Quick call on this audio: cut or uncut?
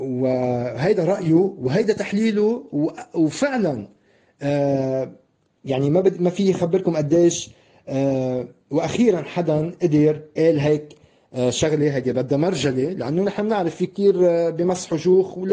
uncut